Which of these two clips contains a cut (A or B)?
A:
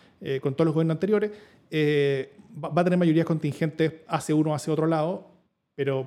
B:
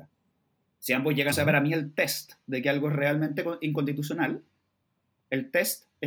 B